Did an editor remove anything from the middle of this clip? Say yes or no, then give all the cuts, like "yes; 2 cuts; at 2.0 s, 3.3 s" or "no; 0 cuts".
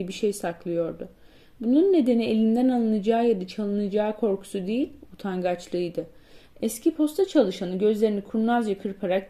yes; 1 cut; at 6.5 s